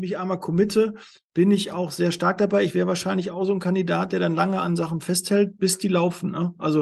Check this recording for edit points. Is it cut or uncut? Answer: uncut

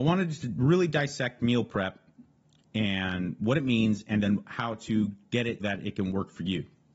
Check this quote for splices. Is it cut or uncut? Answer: cut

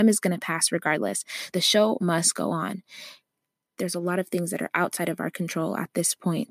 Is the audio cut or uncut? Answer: cut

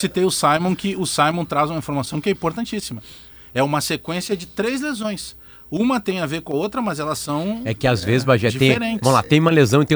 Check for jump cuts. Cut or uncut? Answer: uncut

